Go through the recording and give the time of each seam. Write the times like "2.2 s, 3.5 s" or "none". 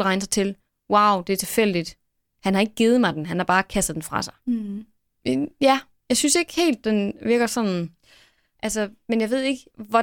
8.6 s